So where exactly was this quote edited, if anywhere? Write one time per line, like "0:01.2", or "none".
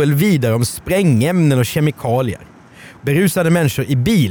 0:03.0